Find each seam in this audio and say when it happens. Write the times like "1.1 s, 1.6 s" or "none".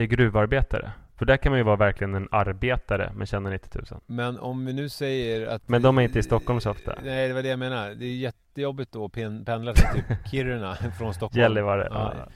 none